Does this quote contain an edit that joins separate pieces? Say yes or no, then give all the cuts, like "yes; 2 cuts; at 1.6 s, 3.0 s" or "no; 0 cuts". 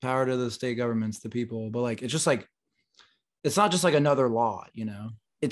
no; 0 cuts